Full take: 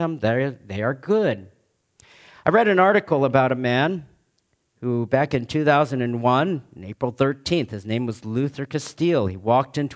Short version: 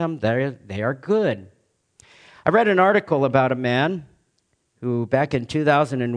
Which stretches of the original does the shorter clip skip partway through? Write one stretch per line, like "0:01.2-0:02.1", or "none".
none